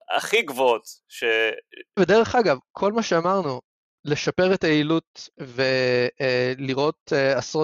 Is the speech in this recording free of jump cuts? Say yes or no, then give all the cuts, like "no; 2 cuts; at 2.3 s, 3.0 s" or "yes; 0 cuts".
no; 2 cuts; at 2.0 s, 5.3 s